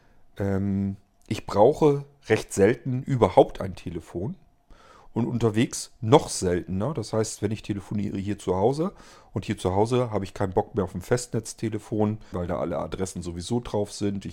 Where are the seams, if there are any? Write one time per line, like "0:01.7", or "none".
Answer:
0:12.3